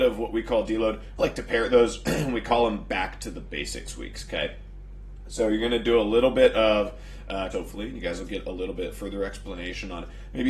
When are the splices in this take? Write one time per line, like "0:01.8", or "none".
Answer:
0:01.2
0:07.5